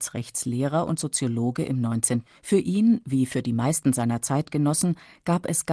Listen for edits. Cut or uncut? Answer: cut